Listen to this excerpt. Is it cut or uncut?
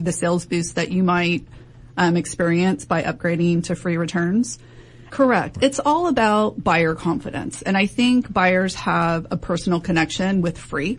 cut